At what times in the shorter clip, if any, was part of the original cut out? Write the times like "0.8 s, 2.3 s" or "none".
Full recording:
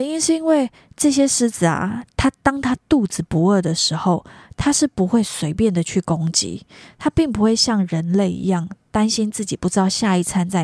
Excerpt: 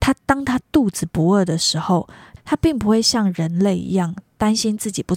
2.4 s